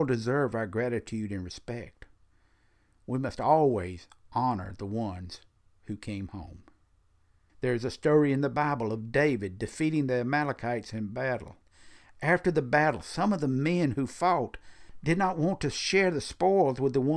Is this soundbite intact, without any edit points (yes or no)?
yes